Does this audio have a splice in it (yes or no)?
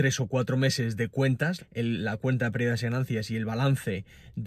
yes